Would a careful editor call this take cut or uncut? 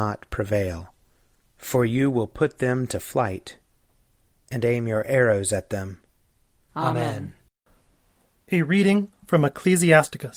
cut